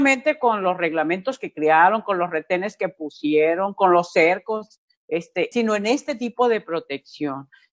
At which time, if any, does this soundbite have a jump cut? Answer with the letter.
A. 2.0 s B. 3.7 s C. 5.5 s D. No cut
C